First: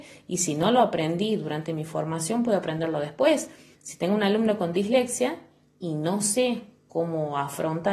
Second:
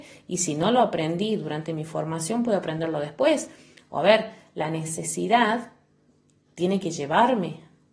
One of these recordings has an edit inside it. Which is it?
first; 1 cut; at 3.7 s

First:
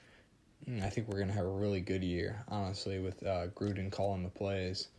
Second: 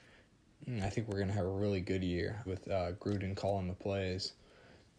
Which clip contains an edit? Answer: second; 1 cut; at 2.5 s

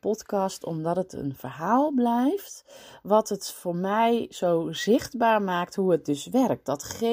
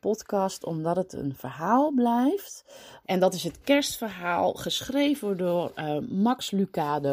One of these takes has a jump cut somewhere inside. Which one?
second; 1 cut; at 3.0 s

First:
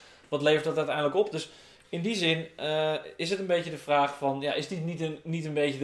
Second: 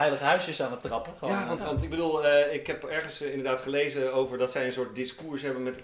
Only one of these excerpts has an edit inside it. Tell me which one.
second; 1 cut; at 1.6 s

